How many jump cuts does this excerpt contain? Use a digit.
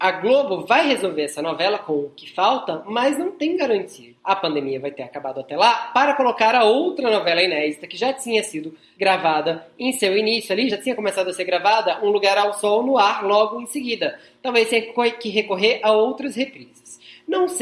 0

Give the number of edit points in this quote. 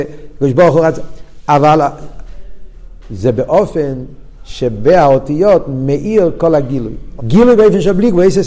1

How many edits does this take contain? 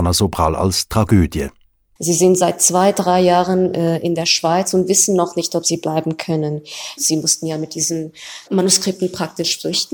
2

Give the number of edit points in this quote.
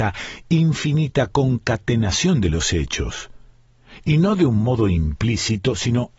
0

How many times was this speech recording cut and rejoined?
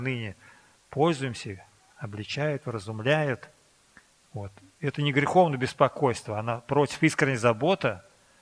1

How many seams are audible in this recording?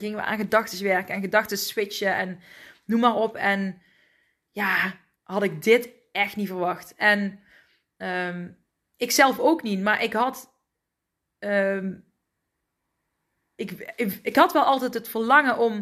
1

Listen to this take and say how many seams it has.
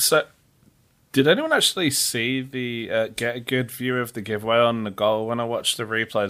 0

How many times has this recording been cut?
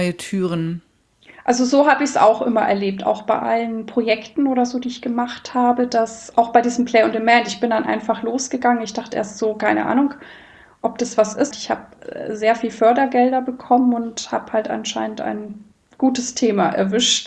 1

